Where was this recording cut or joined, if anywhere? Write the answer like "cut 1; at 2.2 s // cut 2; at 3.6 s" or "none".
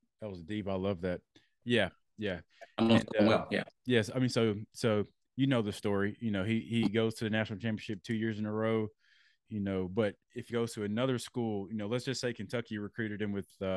cut 1; at 1.6 s // cut 2; at 9.5 s // cut 3; at 10.5 s